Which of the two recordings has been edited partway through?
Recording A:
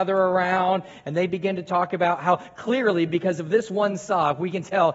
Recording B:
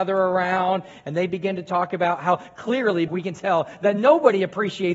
B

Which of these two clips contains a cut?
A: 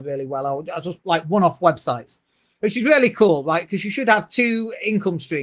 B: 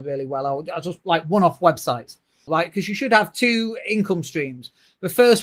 B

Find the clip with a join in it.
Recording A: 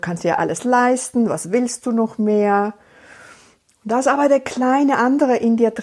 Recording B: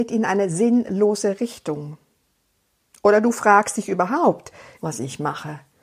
B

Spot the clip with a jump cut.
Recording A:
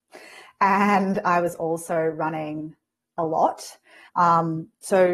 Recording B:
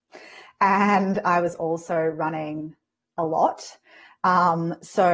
A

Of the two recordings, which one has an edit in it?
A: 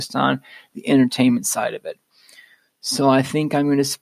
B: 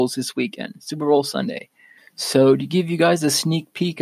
B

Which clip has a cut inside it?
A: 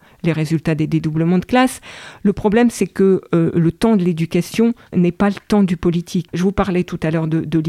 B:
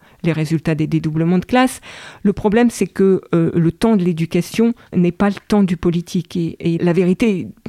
A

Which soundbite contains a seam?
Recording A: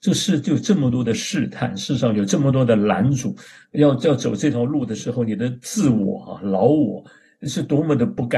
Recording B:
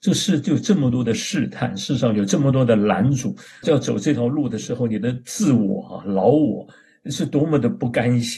B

